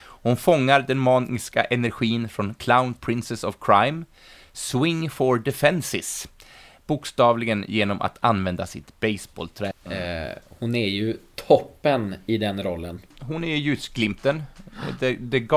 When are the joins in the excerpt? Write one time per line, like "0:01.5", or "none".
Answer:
0:09.7